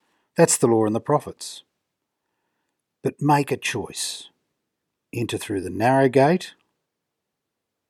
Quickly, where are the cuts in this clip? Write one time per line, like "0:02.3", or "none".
none